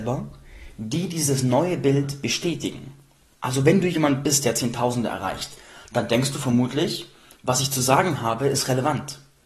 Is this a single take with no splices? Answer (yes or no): yes